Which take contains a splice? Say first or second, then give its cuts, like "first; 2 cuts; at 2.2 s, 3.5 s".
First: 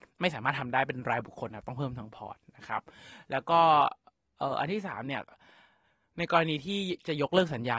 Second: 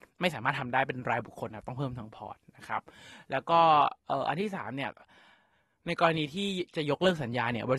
second; 1 cut; at 4.0 s